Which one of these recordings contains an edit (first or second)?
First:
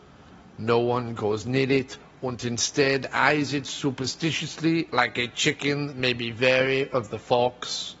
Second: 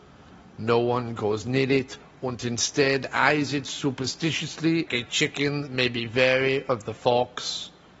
second